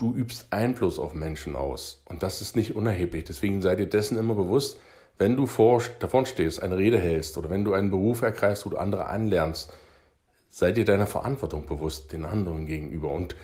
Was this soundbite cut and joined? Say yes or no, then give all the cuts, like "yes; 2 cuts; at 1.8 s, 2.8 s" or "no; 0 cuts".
no; 0 cuts